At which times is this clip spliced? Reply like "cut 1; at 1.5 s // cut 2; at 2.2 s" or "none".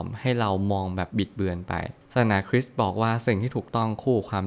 cut 1; at 1.1 s